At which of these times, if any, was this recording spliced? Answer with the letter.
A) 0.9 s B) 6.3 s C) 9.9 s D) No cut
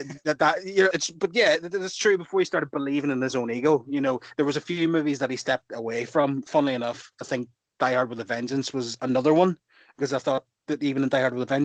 A